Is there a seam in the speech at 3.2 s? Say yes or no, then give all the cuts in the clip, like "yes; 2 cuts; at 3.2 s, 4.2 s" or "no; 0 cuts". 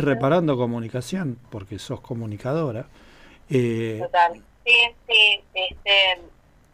no; 1 cut; at 4.5 s